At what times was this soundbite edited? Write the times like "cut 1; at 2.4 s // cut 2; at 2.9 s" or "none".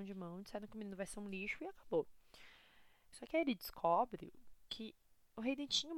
cut 1; at 3.1 s // cut 2; at 4.7 s